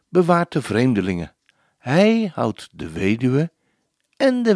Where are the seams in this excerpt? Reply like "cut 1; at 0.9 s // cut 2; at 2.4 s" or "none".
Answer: none

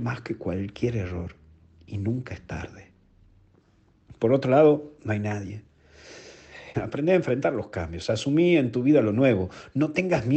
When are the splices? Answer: cut 1; at 6.7 s

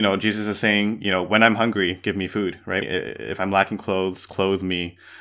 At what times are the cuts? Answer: cut 1; at 2.8 s

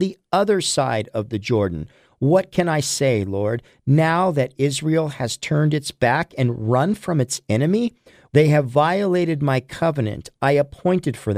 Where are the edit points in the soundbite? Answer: cut 1; at 8.3 s

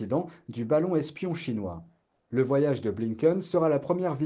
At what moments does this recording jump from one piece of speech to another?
none

